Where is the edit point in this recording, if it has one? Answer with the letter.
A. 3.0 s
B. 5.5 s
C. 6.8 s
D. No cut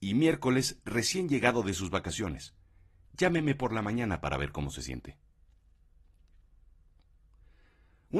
A